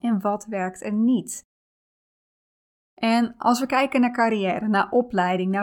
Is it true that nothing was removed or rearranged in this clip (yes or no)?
yes